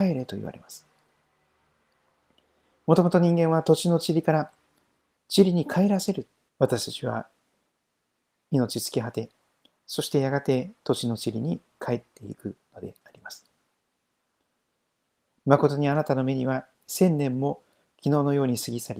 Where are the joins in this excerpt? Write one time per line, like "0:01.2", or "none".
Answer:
0:05.2
0:06.5